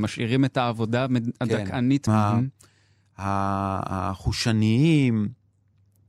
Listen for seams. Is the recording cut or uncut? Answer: cut